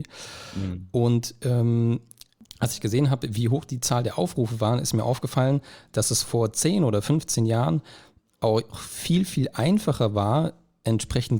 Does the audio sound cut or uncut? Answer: uncut